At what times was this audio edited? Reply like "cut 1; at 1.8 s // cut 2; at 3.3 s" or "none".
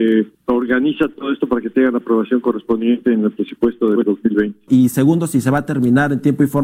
cut 1; at 4.7 s